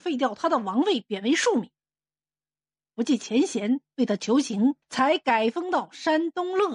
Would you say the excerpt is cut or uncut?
cut